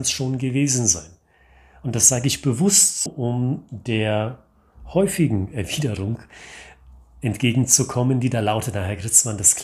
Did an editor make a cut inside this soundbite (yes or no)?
yes